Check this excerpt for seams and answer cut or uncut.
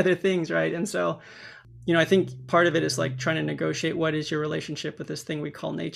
uncut